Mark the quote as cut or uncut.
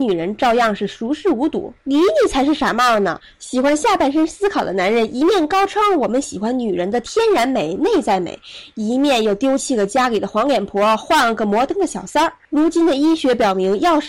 uncut